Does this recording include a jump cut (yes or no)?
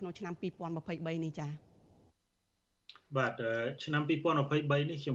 yes